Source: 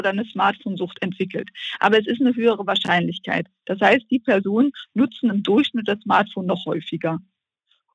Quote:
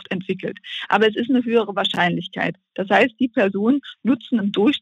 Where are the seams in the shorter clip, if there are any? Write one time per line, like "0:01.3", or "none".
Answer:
none